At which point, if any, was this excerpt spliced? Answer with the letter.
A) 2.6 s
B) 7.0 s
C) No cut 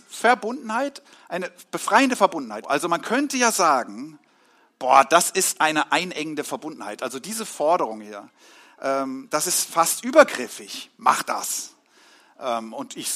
A